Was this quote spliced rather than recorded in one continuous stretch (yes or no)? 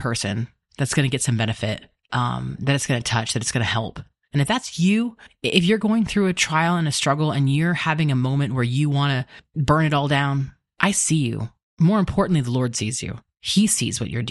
no